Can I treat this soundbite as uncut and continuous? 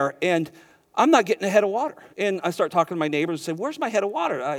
no; 1 cut; at 2.1 s

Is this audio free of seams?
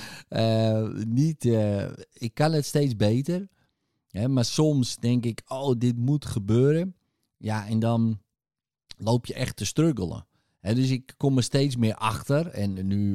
yes; 0 cuts

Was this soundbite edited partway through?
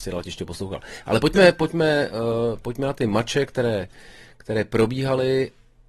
no; 0 cuts

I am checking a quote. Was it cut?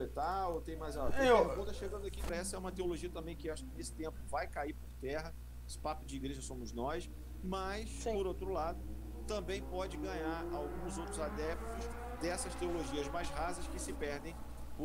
yes; 1 cut; at 2.3 s

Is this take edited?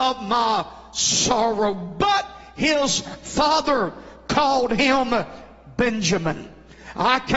no; 0 cuts

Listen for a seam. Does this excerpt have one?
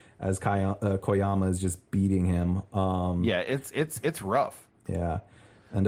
yes; 1 cut; at 4.8 s

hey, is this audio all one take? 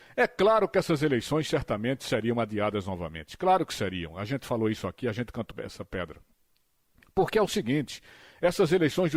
no; 1 cut; at 5.5 s

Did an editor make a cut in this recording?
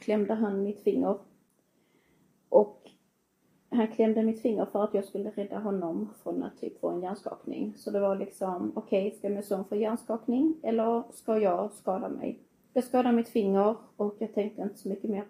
yes; 1 cut; at 12.6 s

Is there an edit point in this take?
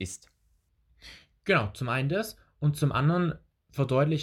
no; 0 cuts

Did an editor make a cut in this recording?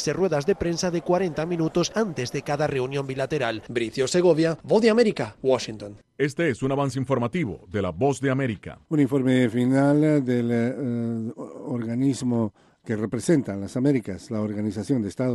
yes; 1 cut; at 8.9 s

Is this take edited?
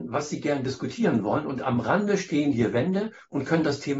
no; 0 cuts

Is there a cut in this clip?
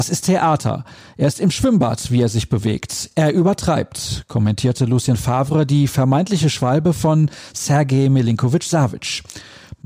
no; 0 cuts

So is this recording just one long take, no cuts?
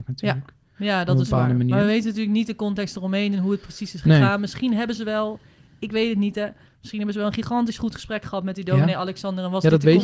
yes; 0 cuts

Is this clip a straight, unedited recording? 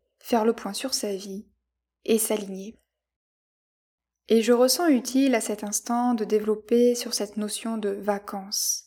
yes; 0 cuts

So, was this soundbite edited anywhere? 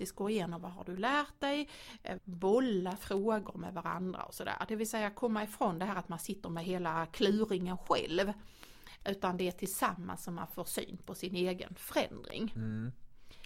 yes; 1 cut; at 2.2 s

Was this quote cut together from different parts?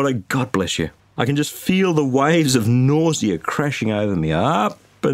yes; 1 cut; at 1.2 s

